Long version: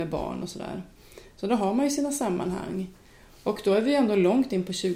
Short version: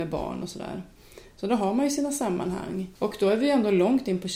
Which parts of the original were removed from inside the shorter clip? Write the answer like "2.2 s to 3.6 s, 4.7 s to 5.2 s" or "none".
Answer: 3.0 s to 3.4 s

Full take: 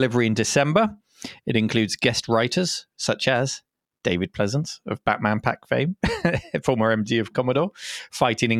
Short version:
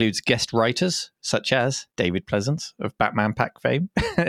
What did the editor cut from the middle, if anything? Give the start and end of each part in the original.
3.7 s to 4.0 s

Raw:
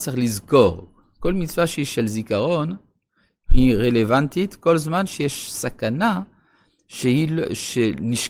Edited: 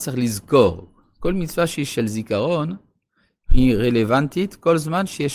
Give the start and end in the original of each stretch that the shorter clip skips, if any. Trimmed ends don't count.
none

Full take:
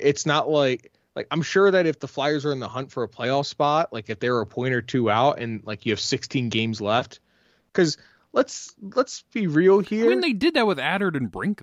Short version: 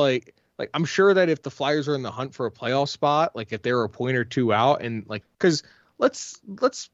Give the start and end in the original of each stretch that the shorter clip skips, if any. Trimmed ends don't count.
5.8 s to 7.6 s

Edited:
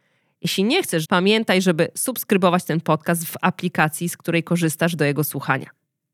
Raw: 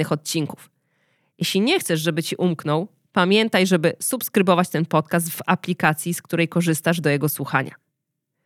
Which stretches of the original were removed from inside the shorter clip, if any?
2.0 s to 3.1 s

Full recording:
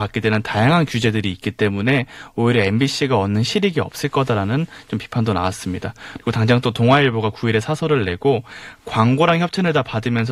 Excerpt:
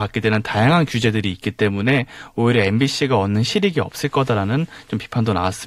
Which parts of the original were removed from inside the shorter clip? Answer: none

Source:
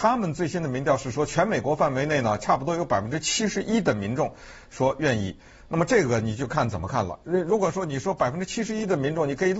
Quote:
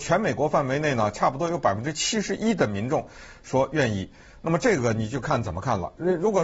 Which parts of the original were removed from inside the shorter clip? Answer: none

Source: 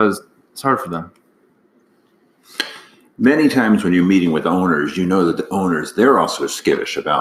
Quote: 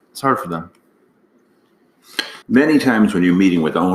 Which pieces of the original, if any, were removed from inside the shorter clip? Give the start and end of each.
2.8 s to 3.1 s

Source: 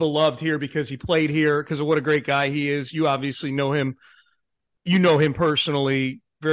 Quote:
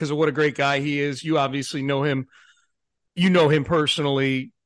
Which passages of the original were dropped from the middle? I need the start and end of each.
none

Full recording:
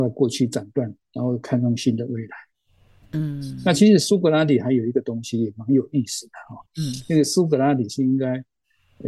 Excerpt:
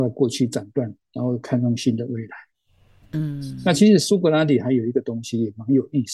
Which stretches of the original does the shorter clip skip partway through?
none

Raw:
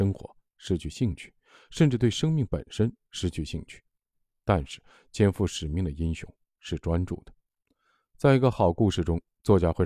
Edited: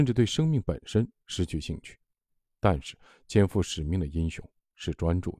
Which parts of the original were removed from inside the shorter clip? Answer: none

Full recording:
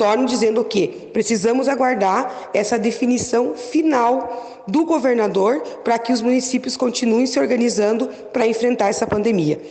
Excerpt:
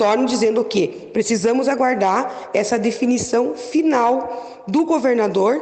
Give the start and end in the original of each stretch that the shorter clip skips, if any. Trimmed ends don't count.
none

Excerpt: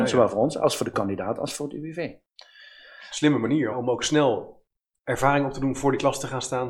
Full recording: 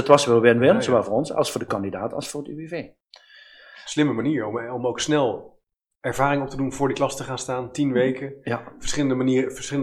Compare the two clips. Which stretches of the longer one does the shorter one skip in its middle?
4.4 s to 4.7 s

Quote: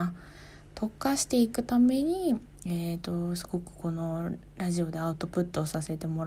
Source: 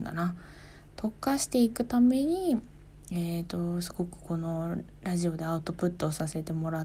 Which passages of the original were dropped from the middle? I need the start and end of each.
2.8 s to 3.0 s

